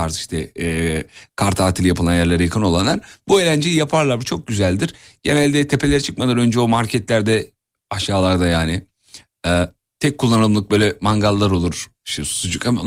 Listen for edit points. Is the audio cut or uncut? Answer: uncut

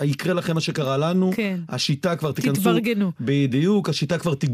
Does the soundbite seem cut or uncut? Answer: uncut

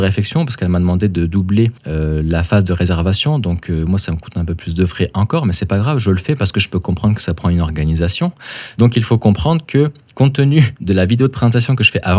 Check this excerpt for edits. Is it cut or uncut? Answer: cut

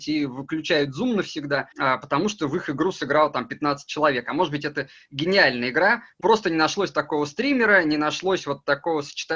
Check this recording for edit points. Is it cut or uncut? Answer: cut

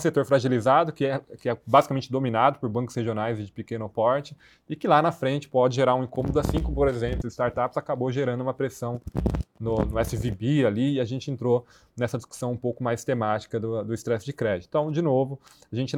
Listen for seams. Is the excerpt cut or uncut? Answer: cut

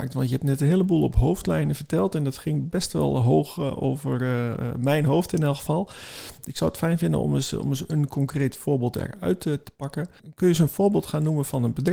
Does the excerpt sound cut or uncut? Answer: uncut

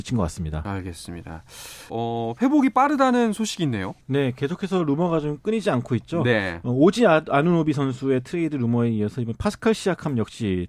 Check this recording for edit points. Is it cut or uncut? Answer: cut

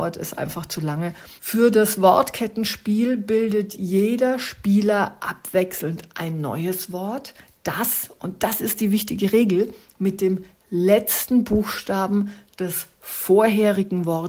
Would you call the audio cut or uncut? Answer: cut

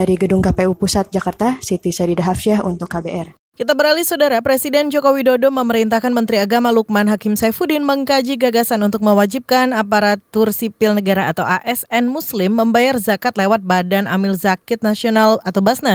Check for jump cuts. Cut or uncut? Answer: cut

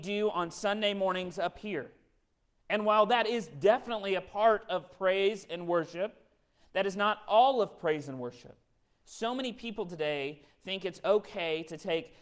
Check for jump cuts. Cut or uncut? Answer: cut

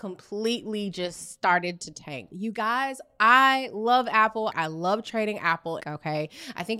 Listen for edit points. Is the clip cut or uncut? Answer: cut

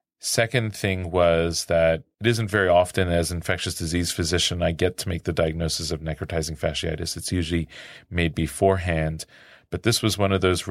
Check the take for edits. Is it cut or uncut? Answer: uncut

